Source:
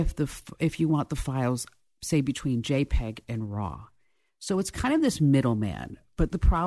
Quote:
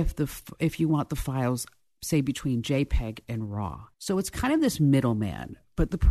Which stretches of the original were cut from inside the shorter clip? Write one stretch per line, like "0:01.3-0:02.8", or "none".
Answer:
0:03.9-0:04.3